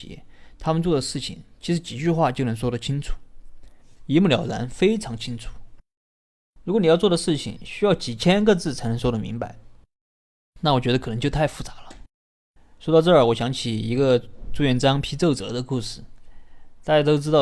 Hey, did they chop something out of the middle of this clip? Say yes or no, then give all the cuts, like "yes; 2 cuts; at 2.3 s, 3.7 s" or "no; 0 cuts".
no; 0 cuts